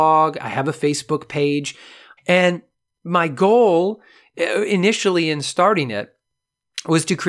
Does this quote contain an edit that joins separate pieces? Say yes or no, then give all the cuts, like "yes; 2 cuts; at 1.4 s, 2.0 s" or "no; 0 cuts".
yes; 1 cut; at 2.2 s